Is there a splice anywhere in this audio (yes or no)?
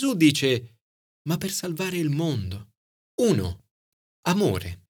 yes